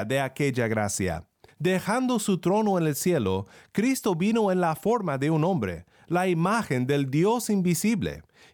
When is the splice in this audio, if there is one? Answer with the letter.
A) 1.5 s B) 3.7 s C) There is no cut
A